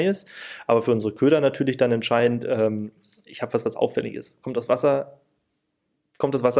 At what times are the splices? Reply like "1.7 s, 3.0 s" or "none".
none